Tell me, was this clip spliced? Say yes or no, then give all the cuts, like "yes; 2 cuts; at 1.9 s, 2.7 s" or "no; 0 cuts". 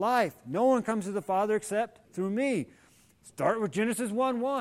yes; 1 cut; at 2.0 s